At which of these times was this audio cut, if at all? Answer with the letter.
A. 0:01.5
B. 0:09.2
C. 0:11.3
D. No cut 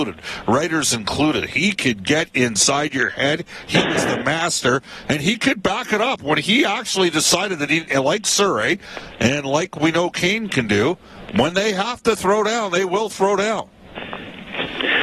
D